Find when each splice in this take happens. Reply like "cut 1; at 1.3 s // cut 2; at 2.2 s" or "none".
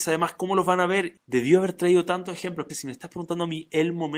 cut 1; at 1.2 s // cut 2; at 2.7 s

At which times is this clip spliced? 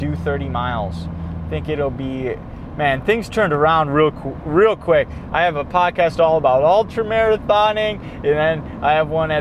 none

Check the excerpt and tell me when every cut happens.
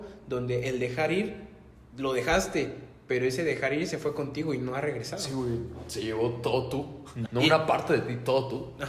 cut 1; at 7.3 s

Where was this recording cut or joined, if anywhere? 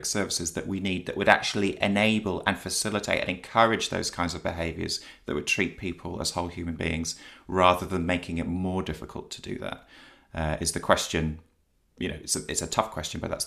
none

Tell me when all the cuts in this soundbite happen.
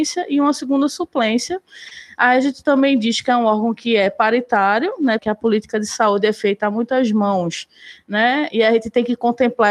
cut 1; at 5.2 s

